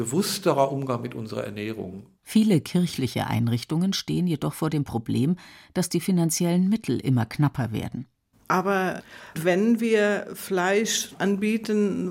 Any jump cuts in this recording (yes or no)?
yes